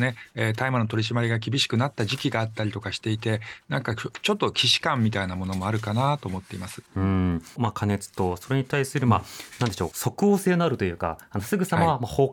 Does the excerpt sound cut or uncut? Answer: cut